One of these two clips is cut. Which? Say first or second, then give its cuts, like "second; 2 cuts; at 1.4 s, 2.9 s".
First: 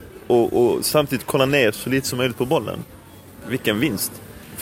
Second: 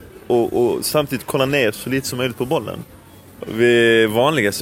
second; 1 cut; at 3.4 s